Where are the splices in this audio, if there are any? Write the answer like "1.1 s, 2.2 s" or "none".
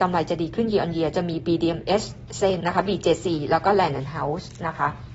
2.6 s